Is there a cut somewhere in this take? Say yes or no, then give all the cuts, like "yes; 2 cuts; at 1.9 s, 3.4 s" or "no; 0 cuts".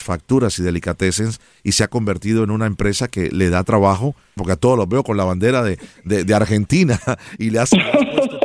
yes; 1 cut; at 4.4 s